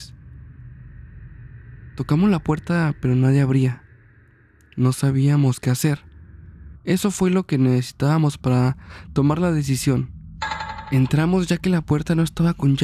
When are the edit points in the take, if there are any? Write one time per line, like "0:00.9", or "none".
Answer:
0:06.7